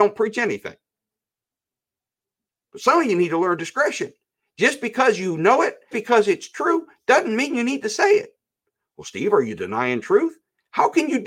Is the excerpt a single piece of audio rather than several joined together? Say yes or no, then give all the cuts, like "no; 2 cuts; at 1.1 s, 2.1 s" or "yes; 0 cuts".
no; 1 cut; at 5.9 s